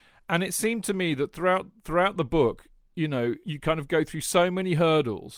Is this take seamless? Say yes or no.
no